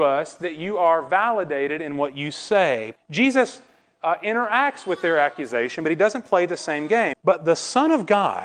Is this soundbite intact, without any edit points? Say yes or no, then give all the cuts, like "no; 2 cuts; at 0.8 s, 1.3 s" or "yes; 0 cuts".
no; 2 cuts; at 3.0 s, 7.1 s